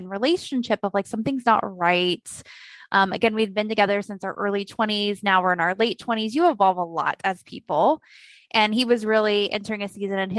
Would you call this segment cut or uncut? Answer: cut